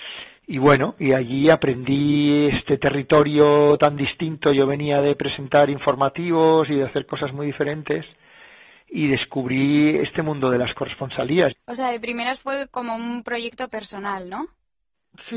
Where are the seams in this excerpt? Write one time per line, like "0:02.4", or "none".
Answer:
0:11.5